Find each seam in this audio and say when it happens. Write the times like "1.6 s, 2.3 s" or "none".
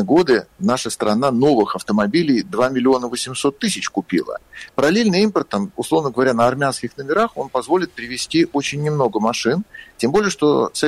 4.7 s